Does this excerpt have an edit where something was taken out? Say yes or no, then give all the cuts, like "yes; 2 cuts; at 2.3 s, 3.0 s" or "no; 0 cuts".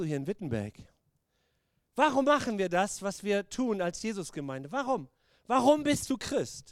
no; 0 cuts